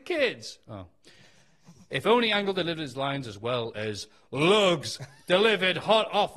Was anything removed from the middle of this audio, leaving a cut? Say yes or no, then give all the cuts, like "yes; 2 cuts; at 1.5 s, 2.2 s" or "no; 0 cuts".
no; 0 cuts